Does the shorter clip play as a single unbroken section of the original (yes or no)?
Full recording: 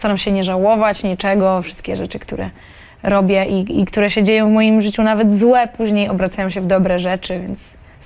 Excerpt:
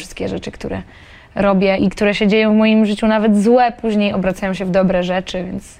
no